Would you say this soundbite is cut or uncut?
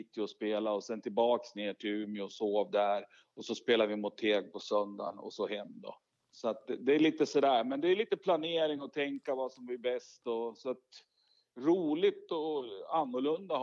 cut